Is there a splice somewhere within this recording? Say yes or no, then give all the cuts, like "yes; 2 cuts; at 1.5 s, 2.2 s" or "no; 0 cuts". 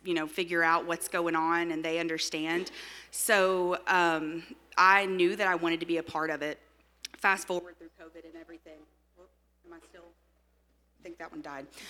no; 0 cuts